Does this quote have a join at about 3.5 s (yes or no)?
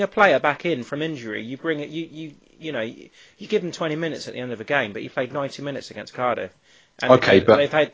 no